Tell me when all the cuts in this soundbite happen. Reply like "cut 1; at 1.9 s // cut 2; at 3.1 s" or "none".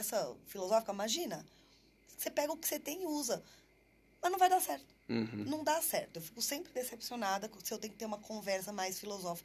none